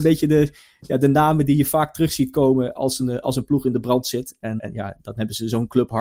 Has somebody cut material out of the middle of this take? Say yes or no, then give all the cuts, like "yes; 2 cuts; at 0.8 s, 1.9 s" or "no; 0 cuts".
yes; 1 cut; at 4.6 s